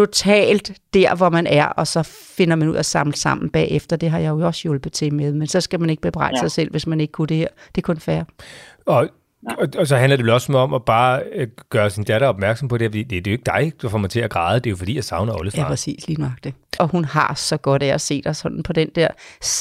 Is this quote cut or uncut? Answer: cut